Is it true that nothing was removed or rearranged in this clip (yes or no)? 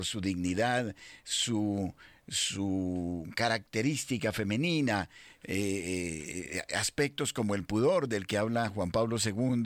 yes